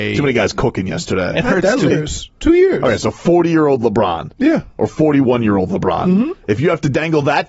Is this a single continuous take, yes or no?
no